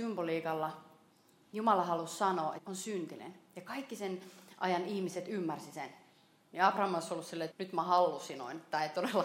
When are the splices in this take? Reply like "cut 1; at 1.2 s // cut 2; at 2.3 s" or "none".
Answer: cut 1; at 2.6 s // cut 2; at 6.4 s // cut 3; at 7.5 s